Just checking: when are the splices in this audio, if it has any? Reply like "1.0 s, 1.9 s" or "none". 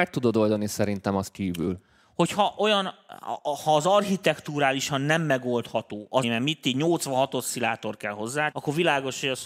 6.2 s, 8.5 s